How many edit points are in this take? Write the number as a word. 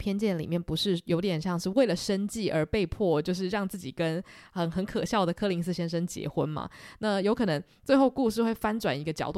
one